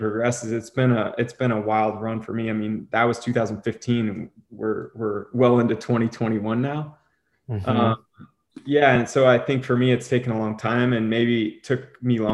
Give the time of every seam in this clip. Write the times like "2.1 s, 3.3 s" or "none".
none